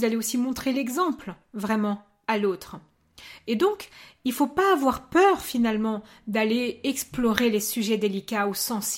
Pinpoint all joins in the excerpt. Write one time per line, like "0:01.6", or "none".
none